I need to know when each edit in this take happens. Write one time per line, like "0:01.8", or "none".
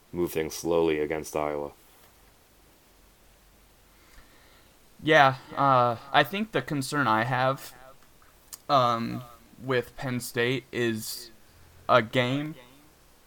none